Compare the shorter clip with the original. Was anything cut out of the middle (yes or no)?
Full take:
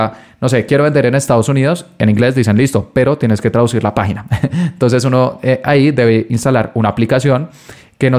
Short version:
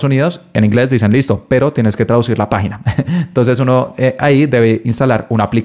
no